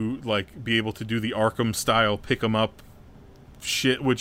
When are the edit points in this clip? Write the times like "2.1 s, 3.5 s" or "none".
none